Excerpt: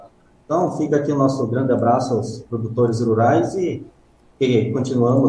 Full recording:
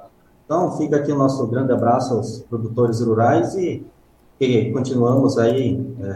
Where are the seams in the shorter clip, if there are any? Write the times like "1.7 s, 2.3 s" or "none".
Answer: none